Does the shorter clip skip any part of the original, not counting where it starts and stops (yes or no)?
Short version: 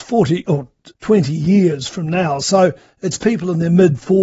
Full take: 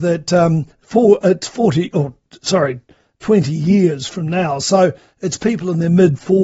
yes